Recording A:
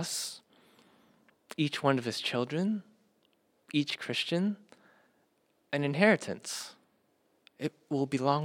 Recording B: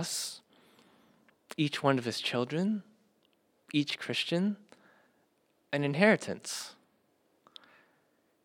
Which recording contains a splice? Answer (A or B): A